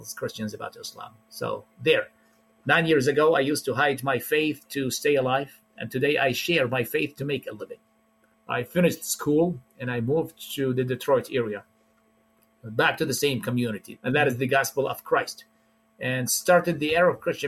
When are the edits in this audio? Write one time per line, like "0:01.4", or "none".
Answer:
0:08.3
0:14.0

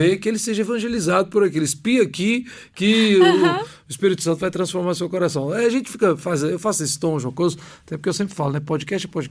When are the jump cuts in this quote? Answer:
none

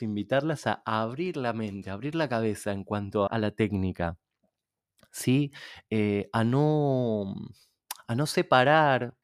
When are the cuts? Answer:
0:03.3

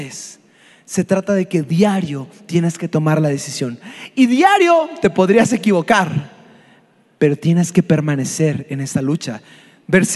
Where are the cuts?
none

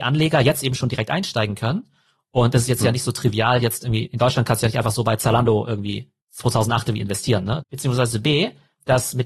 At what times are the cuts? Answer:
0:06.2
0:07.6

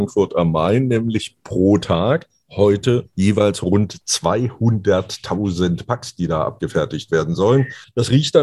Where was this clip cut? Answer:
0:03.1

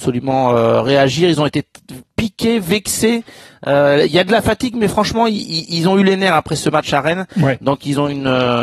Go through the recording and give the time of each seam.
none

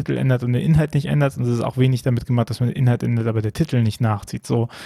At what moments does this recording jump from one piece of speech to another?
none

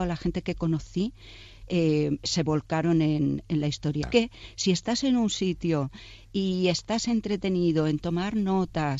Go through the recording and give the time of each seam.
0:04.0

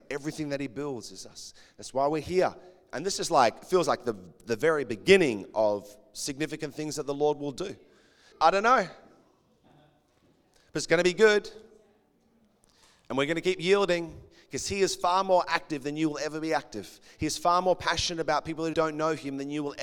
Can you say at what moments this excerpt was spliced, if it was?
0:08.3
0:18.7

